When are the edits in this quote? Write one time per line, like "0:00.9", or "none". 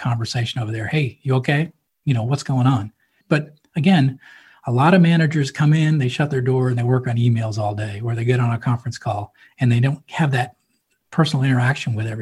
0:03.2

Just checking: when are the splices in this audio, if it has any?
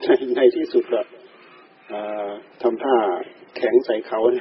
0:02.5

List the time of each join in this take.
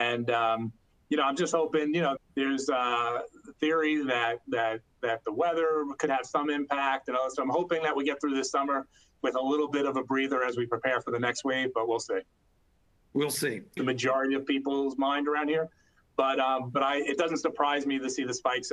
0:02.2
0:13.8

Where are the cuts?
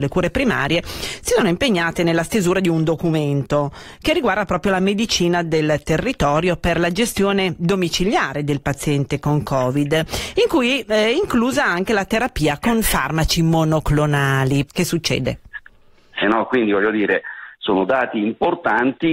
0:14.7
0:16.2

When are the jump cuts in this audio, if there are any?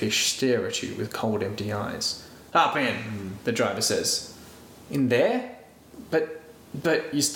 none

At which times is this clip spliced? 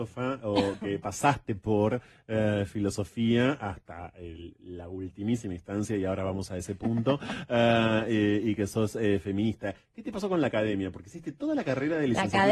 none

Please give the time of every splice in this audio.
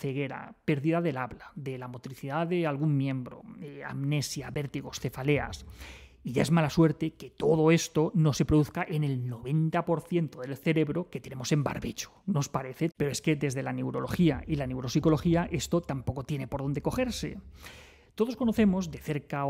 0:12.9

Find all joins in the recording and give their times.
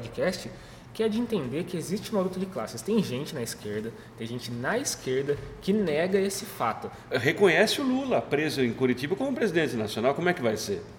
0:07.1

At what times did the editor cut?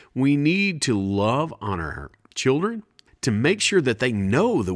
0:03.1

